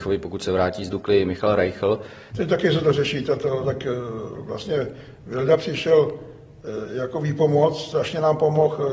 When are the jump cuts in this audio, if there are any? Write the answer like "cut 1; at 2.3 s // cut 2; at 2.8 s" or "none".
cut 1; at 2.3 s // cut 2; at 3.6 s